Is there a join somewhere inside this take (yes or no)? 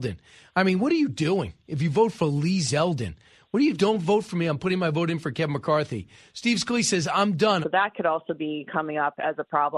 yes